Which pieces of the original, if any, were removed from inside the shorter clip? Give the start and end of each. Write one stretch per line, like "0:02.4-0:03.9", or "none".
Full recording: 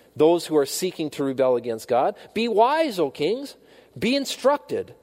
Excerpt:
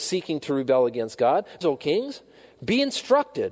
0:02.3-0:02.9